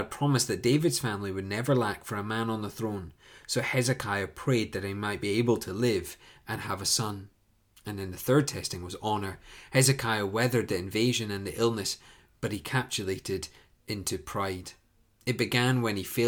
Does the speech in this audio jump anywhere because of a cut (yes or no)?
no